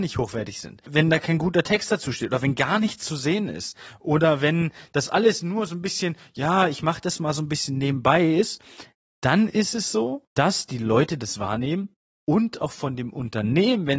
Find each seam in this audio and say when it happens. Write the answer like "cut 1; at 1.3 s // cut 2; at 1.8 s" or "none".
none